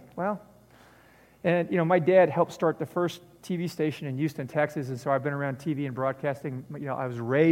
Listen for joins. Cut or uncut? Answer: uncut